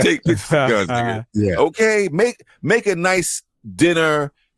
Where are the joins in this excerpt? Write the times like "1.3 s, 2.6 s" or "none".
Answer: none